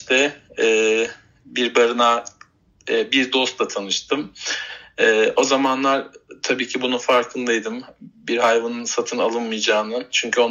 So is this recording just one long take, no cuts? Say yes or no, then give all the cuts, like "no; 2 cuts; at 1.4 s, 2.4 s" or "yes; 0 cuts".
yes; 0 cuts